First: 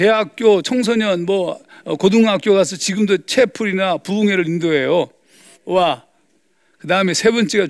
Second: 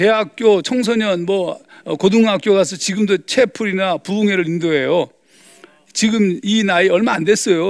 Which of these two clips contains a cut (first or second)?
first